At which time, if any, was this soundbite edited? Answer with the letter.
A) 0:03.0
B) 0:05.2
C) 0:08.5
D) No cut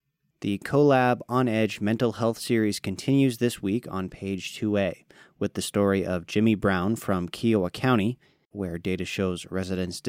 C